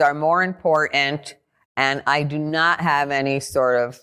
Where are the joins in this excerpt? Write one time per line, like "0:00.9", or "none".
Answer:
none